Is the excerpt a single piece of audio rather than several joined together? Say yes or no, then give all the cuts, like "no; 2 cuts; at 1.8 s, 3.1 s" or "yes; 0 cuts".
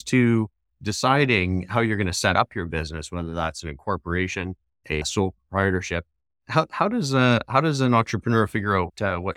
yes; 0 cuts